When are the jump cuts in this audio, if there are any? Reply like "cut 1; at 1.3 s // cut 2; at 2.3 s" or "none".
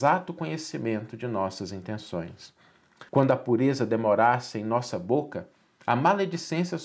cut 1; at 3.1 s